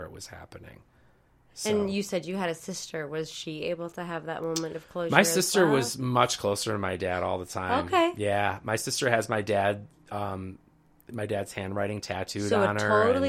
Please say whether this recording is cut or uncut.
uncut